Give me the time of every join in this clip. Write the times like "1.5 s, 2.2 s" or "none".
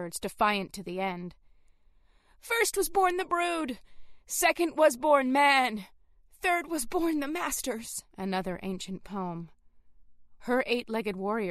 8.1 s, 10.4 s